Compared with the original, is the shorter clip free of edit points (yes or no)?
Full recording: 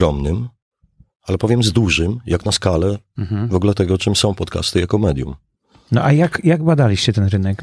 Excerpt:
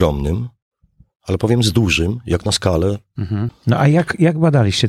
no